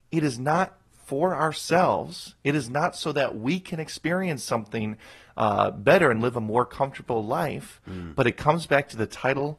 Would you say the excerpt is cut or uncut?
uncut